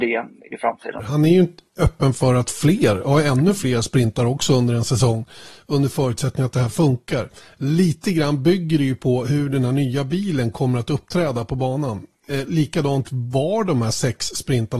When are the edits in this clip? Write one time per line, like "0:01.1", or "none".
0:01.0